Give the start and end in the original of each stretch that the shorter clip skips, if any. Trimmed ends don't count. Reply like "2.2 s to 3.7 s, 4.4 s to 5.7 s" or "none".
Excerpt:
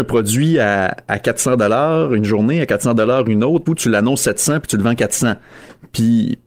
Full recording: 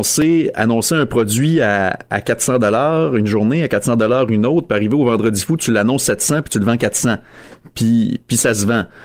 4.7 s to 5.5 s

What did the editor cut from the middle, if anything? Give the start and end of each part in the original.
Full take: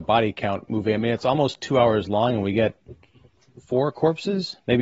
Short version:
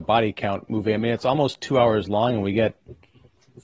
none

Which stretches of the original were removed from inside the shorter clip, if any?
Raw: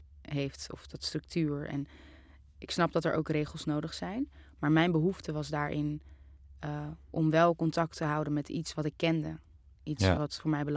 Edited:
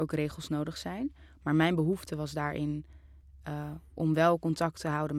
none

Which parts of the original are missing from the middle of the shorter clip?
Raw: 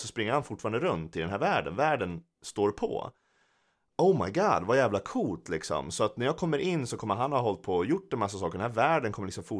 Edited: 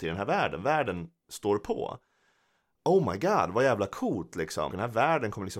5.8 s to 8.5 s

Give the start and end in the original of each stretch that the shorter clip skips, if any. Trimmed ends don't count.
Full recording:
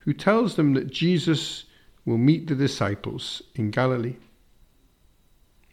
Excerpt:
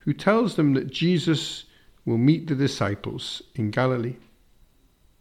none

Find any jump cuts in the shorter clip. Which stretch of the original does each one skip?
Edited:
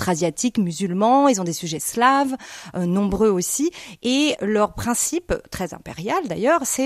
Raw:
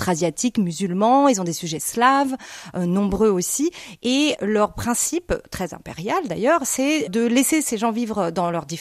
none

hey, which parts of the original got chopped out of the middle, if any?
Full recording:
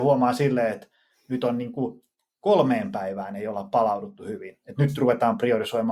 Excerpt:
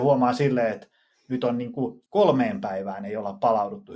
2.1 s to 2.4 s

